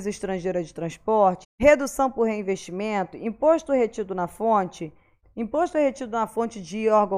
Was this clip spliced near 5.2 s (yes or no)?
yes